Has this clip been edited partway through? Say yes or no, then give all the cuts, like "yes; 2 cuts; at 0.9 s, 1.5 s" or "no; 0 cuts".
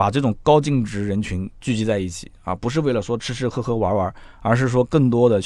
no; 0 cuts